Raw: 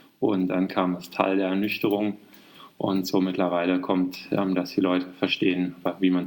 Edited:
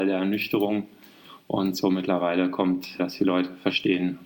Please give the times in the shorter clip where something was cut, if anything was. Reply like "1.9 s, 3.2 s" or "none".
3.0 s